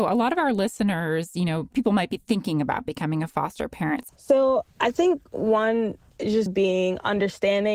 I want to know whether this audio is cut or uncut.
cut